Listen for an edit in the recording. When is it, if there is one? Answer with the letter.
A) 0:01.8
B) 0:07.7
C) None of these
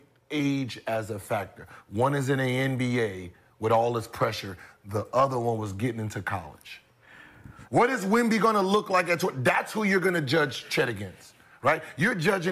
B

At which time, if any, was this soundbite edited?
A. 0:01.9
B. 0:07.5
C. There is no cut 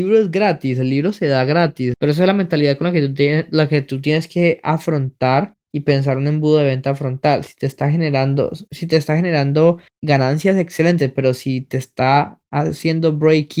A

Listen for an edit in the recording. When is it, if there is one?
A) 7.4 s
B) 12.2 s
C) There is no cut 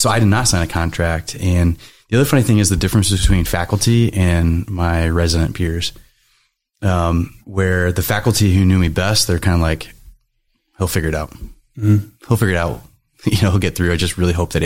A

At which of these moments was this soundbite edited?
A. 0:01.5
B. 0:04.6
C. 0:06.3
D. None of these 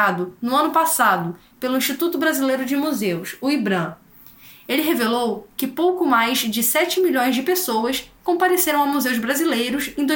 D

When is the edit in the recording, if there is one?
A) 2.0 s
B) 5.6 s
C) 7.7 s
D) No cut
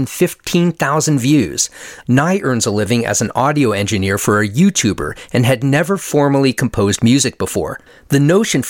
A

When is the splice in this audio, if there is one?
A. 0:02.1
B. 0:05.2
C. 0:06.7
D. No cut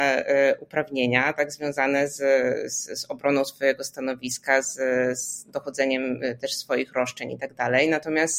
D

